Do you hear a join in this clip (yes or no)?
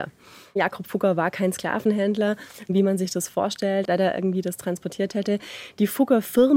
yes